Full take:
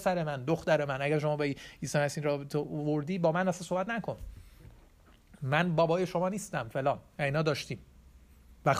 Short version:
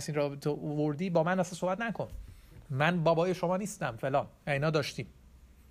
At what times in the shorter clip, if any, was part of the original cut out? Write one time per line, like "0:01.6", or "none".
0:02.6

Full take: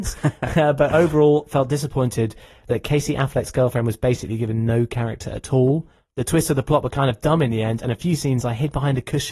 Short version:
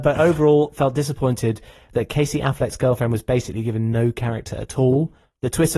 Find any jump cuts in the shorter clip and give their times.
none

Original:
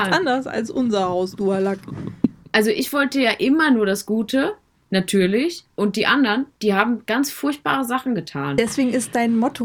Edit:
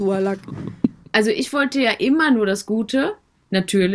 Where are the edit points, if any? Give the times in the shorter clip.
none

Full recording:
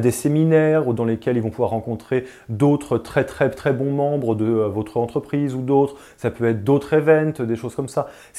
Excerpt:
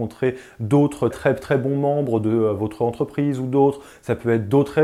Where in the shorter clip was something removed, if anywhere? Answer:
0:01.1

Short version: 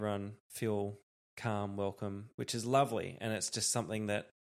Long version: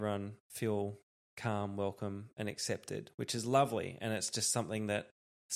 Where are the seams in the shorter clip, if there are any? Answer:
0:02.3

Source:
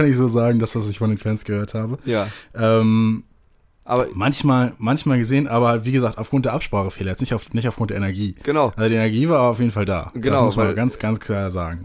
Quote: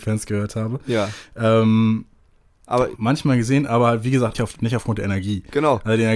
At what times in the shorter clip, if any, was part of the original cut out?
0:03.0
0:04.3

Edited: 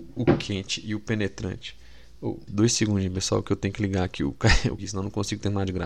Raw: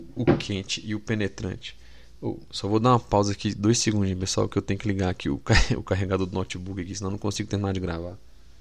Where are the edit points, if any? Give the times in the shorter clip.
0:02.5
0:04.8

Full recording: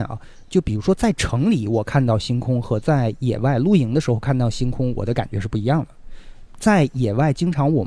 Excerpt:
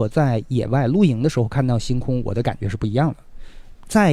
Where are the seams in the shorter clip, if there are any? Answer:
none

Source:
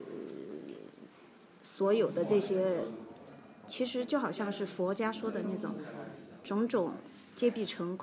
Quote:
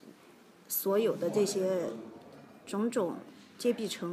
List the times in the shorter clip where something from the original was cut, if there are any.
0:02.6

